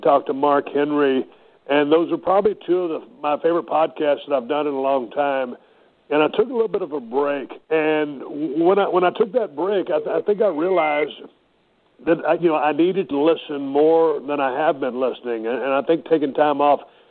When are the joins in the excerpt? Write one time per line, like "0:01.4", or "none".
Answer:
0:07.6
0:13.1